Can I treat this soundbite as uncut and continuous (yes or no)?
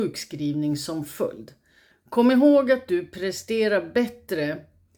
no